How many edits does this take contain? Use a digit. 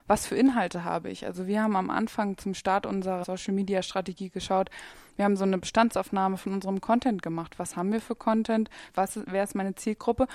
2